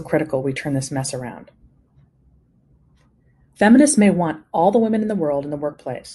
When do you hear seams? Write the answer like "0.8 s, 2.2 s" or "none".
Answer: 3.5 s